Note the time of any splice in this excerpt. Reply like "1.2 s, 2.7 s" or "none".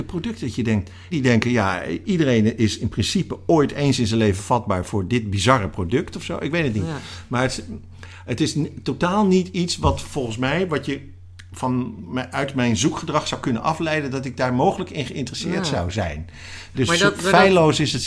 1.1 s, 16.7 s